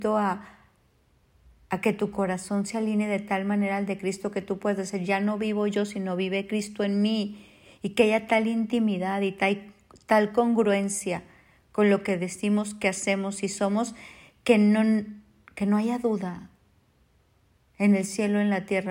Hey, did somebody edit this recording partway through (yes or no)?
no